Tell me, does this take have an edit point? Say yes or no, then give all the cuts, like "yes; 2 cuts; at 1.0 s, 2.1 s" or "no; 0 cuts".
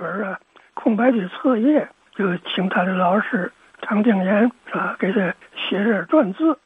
no; 0 cuts